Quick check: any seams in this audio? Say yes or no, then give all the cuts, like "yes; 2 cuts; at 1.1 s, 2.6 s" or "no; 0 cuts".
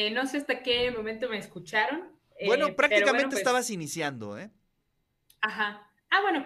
no; 0 cuts